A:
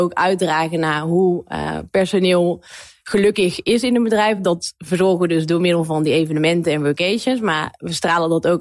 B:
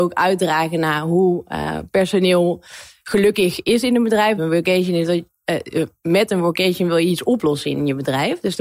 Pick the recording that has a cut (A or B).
B